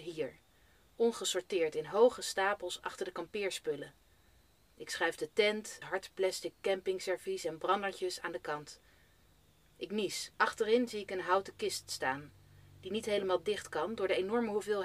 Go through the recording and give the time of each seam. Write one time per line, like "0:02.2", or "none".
0:05.8
0:10.3